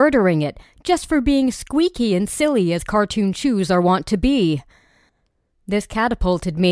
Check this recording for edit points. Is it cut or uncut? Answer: uncut